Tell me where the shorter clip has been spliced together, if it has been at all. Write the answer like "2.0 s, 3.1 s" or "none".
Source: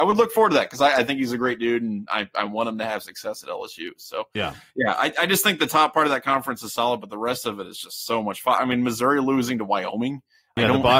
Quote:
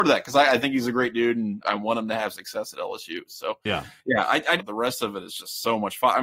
1.6 s, 4.6 s

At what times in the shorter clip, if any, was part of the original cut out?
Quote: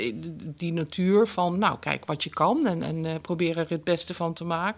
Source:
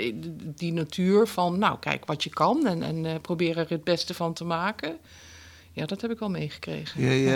none

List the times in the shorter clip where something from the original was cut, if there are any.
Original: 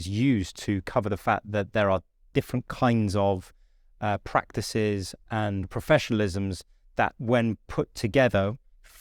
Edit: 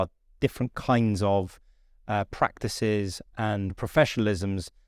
none

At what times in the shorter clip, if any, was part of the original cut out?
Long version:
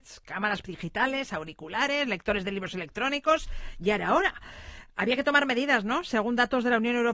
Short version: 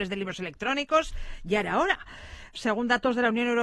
2.5 s

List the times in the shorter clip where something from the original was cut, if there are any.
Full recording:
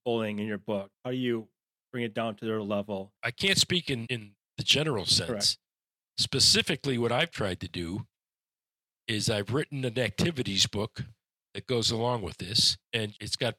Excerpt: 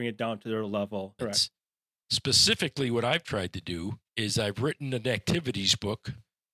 1.2 s, 4.1 s

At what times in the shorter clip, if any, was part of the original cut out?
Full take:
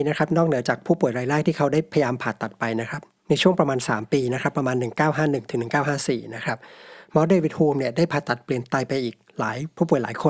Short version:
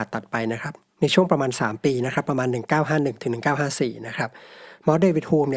none

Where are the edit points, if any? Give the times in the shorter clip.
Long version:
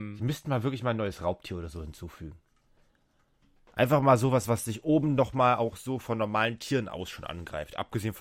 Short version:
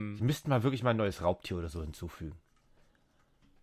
none

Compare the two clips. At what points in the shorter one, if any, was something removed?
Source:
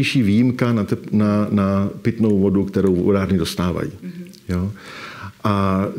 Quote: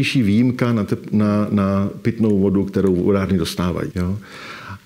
3.9 s

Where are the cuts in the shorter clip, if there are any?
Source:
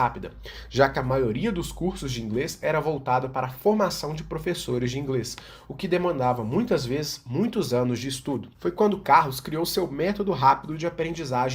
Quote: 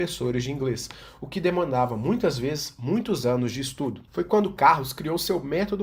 none

